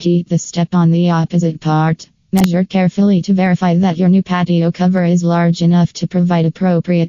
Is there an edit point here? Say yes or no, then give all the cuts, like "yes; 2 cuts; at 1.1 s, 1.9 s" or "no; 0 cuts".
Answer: yes; 1 cut; at 2.1 s